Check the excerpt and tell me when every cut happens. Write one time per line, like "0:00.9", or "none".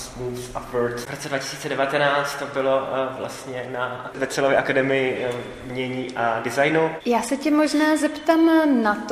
0:01.1
0:07.0